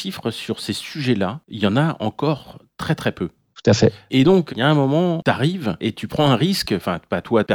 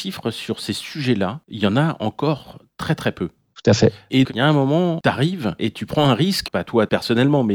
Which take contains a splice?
second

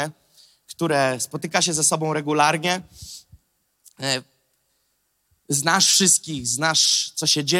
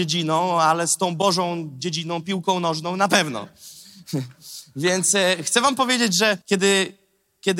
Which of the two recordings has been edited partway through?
second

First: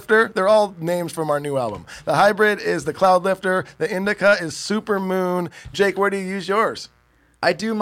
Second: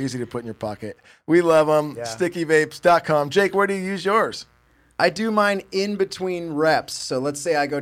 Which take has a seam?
first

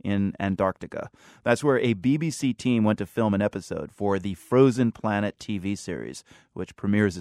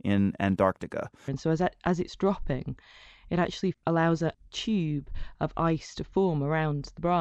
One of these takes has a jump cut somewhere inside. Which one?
second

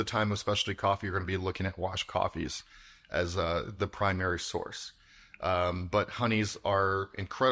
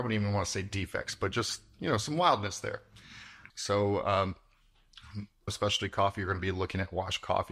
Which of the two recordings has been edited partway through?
second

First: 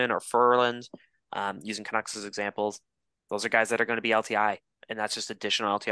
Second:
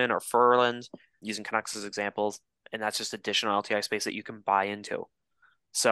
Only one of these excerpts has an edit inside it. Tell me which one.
second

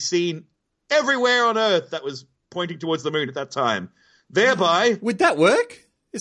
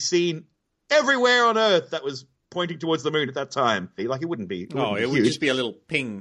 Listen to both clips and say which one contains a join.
second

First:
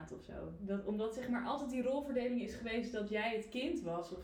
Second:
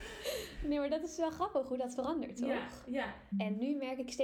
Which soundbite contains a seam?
second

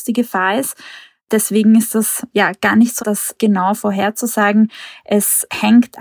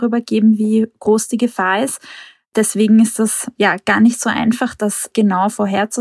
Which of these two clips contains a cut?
first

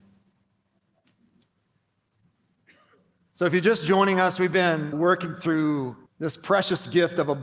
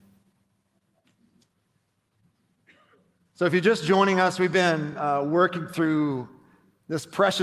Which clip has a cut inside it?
first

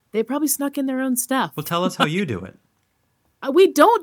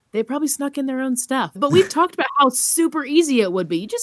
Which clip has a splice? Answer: second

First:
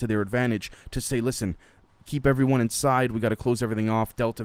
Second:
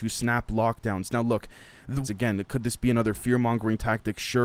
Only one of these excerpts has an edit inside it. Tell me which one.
second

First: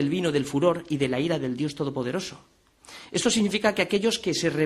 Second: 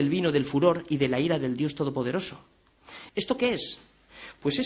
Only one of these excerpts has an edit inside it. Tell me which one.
second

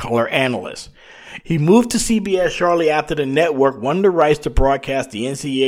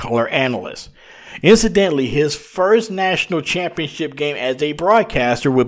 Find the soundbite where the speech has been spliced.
first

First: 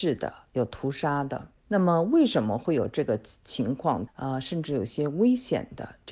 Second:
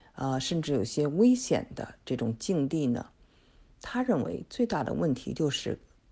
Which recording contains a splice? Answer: first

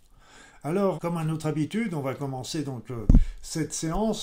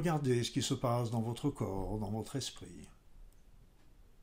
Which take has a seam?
first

